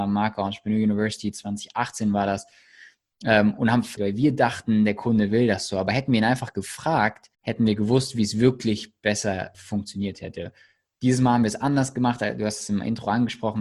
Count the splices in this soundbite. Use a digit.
3